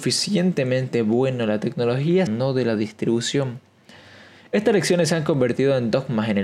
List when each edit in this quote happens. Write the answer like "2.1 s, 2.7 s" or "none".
2.3 s